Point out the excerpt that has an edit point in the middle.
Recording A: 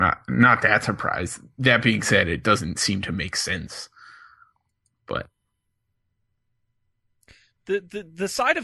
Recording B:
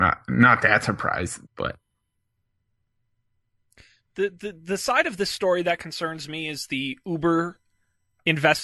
B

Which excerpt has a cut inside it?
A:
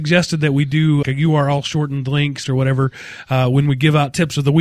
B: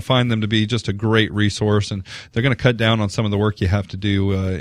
A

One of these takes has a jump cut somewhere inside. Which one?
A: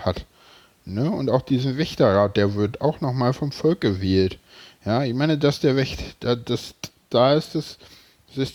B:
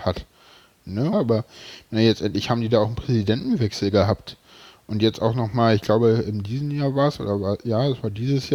B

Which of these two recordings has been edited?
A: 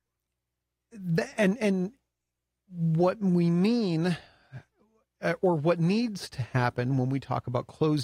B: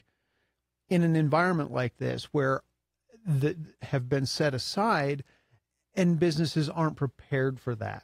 B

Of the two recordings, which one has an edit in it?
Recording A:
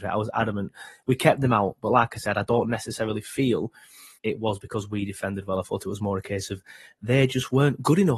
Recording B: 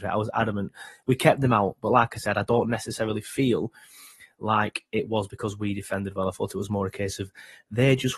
A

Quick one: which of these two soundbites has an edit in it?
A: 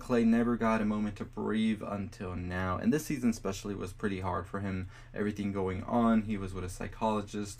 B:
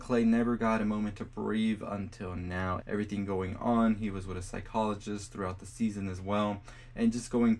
B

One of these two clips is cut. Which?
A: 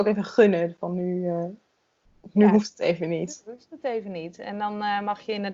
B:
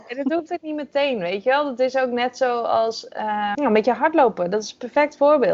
B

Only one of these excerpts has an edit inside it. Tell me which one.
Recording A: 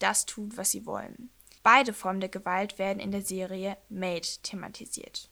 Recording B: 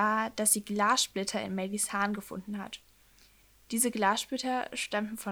A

